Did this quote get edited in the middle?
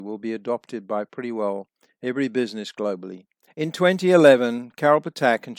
yes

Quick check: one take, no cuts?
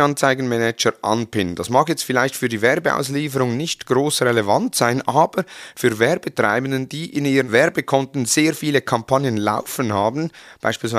yes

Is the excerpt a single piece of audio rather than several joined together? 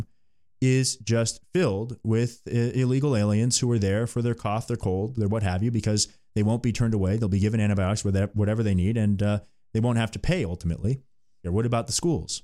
no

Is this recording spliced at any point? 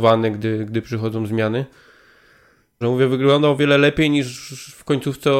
yes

